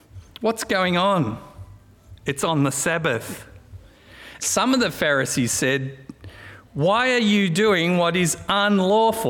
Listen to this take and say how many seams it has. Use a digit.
1